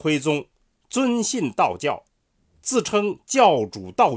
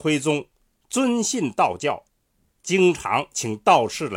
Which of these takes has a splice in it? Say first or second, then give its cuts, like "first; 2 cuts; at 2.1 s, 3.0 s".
second; 1 cut; at 2.5 s